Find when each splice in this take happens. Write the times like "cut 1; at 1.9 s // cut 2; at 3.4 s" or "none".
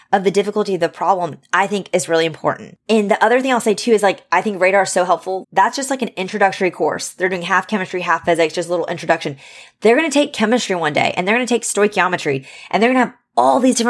cut 1; at 5.4 s